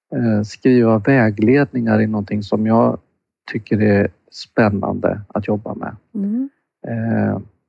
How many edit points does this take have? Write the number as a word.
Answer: zero